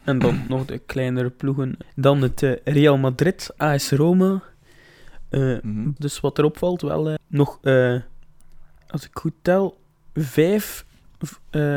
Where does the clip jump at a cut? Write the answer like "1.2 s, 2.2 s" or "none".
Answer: 1.8 s, 6.0 s, 7.2 s